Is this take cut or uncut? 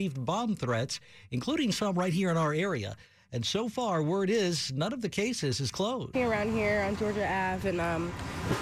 cut